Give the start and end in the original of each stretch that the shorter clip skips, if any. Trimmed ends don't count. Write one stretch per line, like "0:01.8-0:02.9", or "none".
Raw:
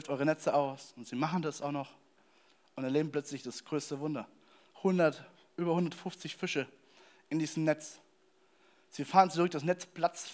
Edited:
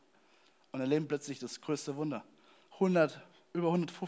none

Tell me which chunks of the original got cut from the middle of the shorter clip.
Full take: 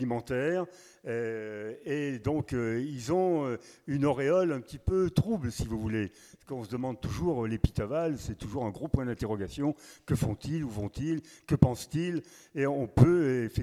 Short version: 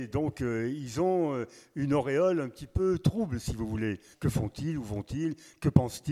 0:06.2-0:10.0

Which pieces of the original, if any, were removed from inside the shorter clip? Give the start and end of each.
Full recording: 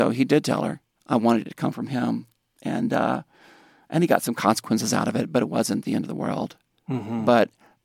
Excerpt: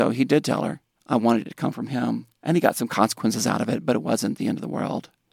0:02.4-0:03.9

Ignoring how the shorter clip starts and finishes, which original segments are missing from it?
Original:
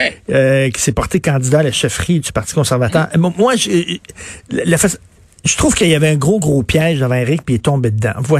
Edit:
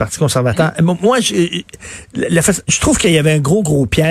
0:05.0-0:05.4

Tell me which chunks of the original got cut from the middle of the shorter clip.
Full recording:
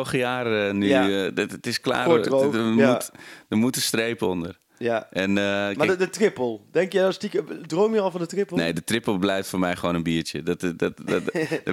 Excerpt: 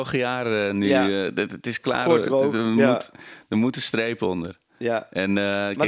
none

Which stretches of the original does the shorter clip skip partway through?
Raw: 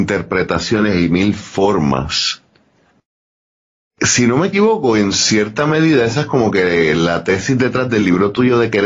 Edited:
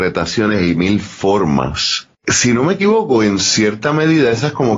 0:02.5-0:03.9

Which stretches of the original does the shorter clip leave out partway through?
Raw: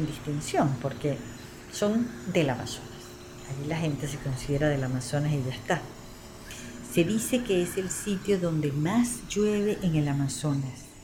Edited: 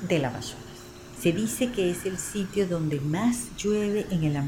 0:03.4-0:06.9

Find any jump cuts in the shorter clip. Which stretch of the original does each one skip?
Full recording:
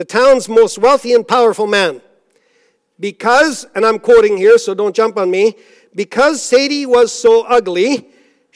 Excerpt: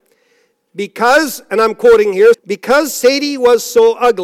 0:04.6-0:05.8

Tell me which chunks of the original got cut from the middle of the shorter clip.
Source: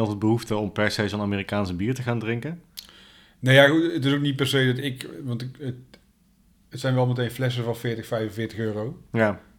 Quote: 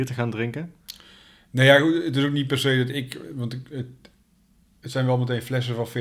none

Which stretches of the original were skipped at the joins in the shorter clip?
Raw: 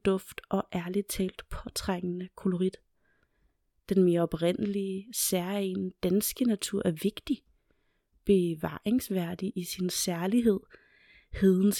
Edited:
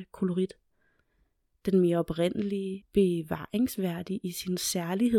0:05.0-0:08.1

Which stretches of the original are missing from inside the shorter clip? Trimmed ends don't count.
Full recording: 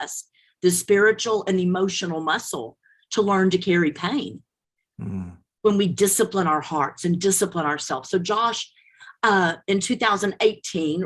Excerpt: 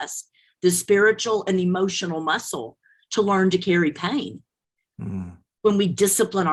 none

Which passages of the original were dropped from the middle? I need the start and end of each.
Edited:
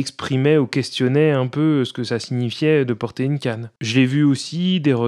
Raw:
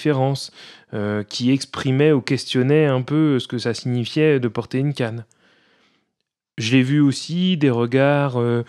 0:05.3-0:06.5

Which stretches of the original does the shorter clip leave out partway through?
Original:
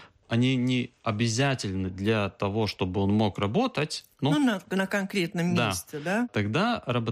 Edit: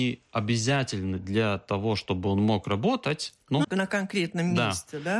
0:04.4-0:04.6

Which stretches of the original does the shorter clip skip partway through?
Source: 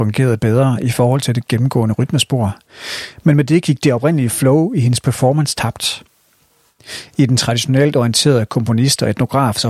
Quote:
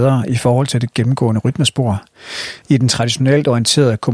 0:03.2-0:07.1

